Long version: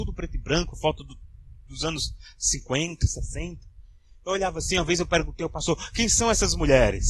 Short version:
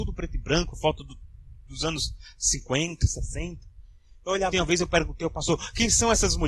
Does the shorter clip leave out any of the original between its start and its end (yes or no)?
yes